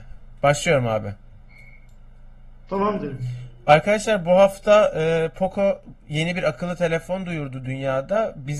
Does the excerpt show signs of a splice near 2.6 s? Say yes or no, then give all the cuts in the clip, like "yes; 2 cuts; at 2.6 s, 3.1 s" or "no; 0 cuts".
no; 1 cut; at 6.0 s